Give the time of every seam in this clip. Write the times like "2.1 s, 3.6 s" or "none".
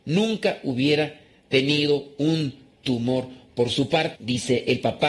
4.2 s